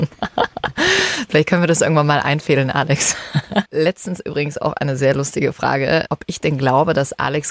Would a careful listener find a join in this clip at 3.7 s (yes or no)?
yes